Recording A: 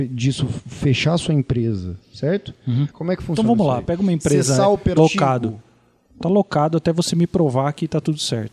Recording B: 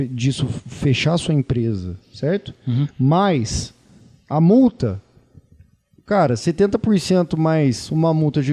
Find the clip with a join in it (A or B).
A